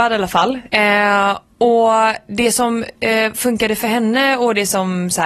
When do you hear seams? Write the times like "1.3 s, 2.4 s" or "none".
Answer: none